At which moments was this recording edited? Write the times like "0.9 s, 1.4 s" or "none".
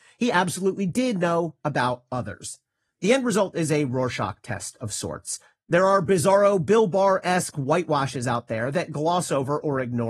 none